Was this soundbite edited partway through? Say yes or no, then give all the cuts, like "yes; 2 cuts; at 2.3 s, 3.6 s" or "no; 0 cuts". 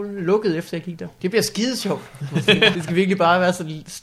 yes; 2 cuts; at 1.2 s, 2.7 s